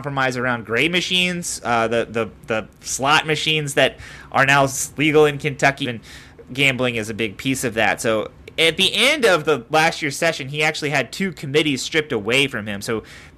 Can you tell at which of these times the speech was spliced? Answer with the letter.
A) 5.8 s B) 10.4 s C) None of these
A